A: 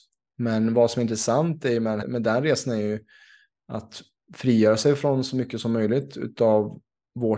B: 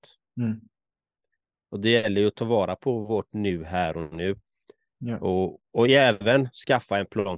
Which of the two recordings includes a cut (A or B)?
A